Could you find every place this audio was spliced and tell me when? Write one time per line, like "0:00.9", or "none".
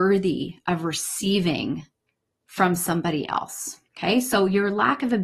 0:03.9

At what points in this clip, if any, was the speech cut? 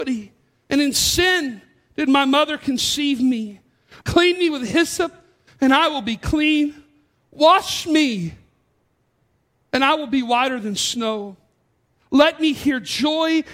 0:04.0

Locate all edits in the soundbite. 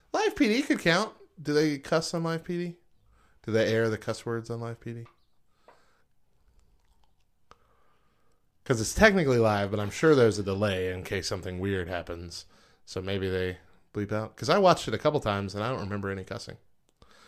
none

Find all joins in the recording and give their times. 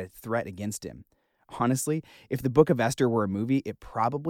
none

